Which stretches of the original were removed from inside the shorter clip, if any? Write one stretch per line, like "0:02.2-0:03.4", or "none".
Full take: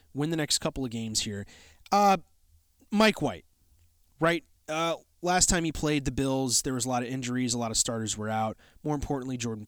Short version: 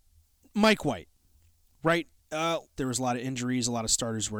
0:05.1-0:06.6